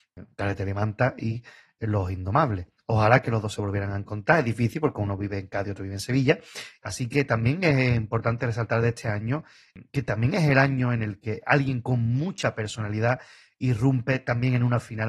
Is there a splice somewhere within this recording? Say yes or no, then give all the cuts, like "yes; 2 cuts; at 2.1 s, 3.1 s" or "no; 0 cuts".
yes; 2 cuts; at 6.8 s, 9.9 s